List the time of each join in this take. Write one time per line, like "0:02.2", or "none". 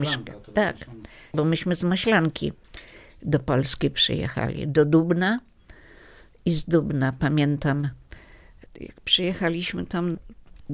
none